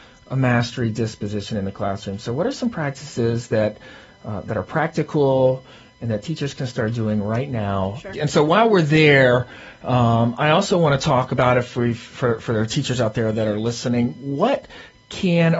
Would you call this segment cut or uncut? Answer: cut